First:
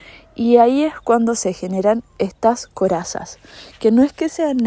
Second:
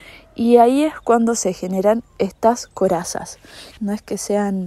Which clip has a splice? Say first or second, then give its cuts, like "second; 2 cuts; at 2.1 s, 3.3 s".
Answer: second; 1 cut; at 3.8 s